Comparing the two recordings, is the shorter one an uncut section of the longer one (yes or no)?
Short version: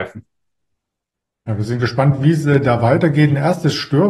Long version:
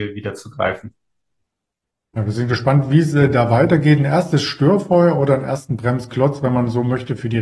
yes